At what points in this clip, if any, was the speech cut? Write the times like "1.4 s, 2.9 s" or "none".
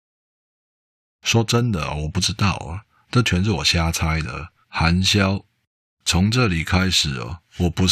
4.6 s